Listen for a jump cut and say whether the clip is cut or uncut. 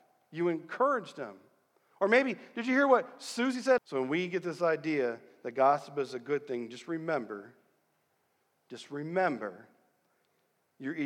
cut